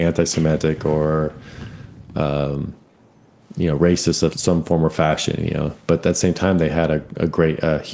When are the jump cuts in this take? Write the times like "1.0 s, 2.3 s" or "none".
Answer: 4.3 s